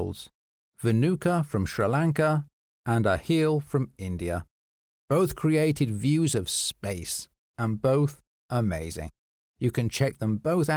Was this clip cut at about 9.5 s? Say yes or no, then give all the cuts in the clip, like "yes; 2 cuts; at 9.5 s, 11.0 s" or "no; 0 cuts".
no; 1 cut; at 7.5 s